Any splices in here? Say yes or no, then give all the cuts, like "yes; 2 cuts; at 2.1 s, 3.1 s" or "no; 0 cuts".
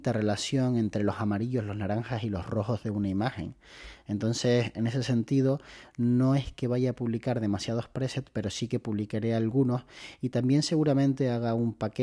no; 0 cuts